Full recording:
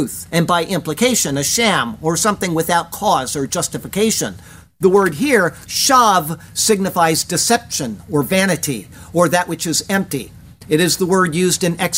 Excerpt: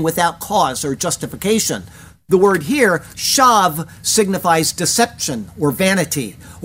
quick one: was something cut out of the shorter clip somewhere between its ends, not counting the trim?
no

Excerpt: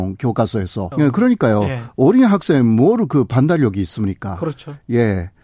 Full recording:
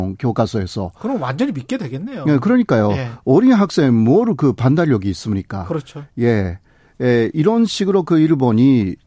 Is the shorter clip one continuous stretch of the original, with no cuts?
no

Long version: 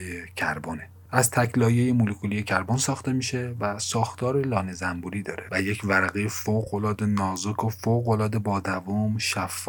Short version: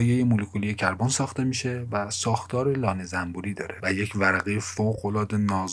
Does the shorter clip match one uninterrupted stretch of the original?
yes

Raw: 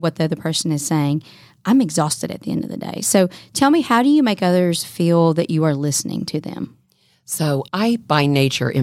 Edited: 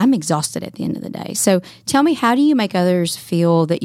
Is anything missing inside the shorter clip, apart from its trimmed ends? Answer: no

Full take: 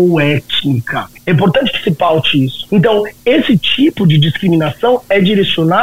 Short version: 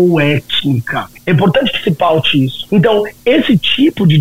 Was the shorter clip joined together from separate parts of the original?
no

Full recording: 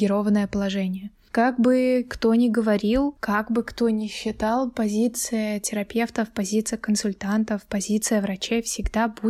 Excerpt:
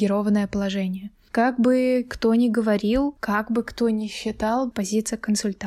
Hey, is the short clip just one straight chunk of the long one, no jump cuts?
no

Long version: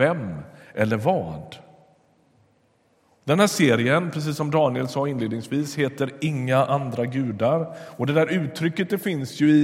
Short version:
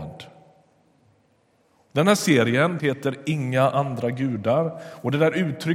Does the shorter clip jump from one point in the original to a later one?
yes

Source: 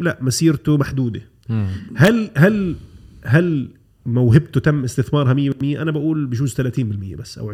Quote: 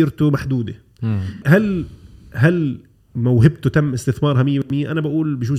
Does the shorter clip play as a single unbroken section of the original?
no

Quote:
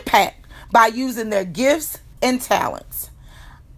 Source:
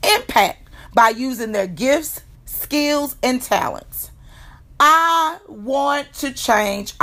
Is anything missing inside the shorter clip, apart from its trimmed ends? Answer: yes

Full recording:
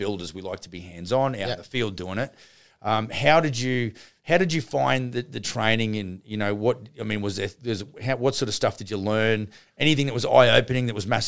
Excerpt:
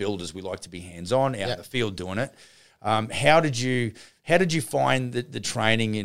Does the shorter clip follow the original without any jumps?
yes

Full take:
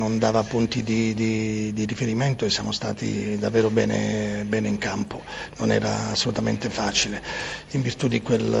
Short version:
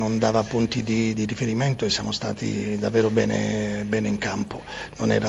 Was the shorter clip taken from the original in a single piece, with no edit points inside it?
no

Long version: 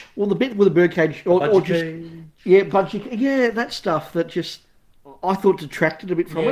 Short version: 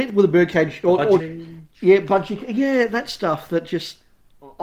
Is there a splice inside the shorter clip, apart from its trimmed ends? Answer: yes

